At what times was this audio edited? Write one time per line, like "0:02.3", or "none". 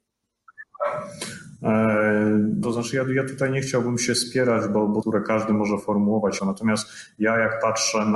0:02.6
0:05.0
0:06.4